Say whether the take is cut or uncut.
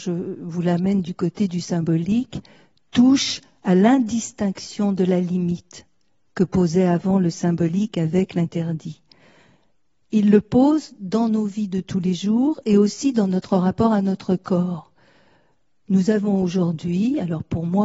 uncut